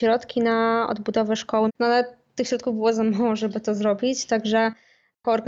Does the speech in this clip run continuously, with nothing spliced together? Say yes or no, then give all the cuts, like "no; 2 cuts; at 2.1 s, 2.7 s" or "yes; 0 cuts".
no; 1 cut; at 1.7 s